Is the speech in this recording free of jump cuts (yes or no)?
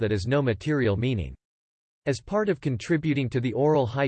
yes